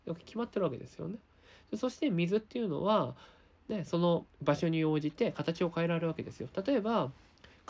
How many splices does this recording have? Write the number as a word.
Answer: one